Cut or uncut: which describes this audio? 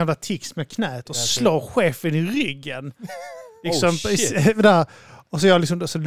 uncut